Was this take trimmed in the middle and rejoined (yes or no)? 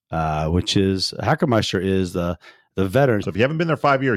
yes